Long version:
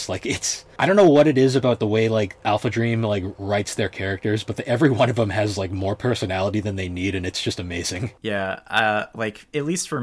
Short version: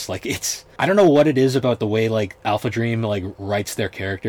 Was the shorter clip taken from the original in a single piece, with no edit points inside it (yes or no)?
yes